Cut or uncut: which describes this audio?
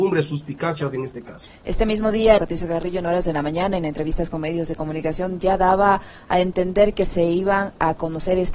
cut